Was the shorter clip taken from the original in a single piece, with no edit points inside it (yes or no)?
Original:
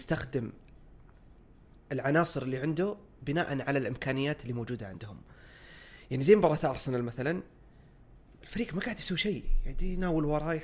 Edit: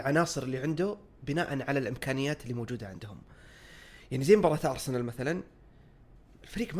yes